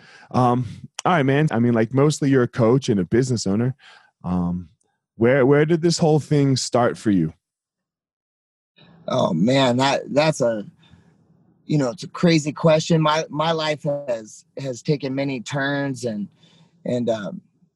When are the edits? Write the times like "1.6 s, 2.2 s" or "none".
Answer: 1.5 s

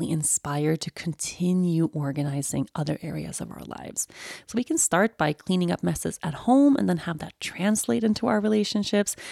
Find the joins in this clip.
none

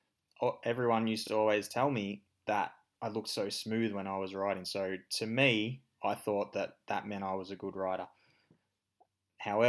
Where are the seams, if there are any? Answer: none

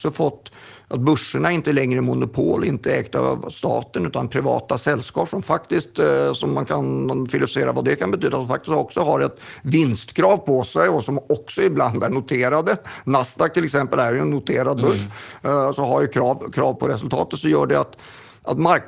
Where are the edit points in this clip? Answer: 16.8 s

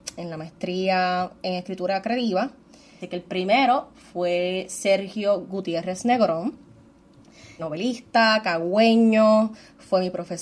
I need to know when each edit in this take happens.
3.0 s, 7.6 s

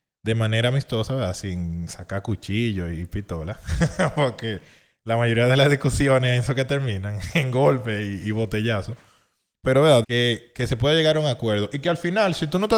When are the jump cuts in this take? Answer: 10.0 s

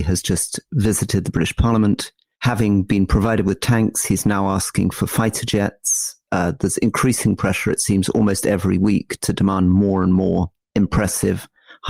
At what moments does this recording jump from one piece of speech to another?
none

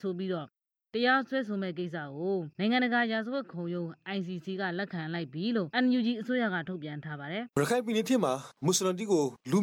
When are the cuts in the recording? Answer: 7.5 s

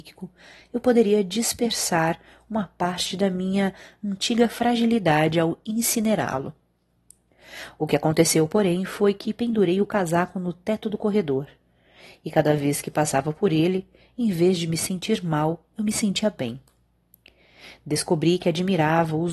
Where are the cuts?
none

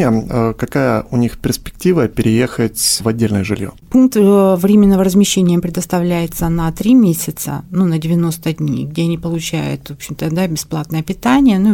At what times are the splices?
3.8 s

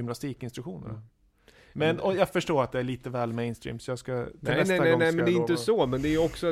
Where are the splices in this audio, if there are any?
none

